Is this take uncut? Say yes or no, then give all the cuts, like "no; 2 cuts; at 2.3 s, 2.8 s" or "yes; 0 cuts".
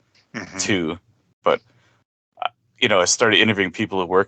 no; 1 cut; at 1.4 s